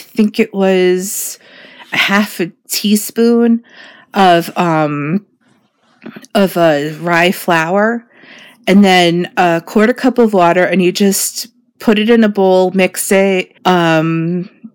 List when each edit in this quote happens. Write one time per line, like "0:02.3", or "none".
0:13.6